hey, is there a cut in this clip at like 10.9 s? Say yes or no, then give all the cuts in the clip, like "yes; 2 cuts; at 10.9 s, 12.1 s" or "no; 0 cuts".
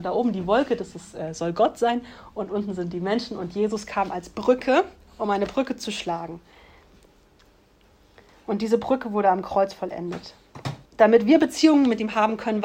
yes; 1 cut; at 10.9 s